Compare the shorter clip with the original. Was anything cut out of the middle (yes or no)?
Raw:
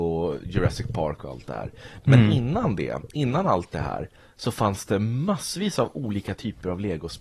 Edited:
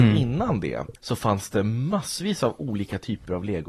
yes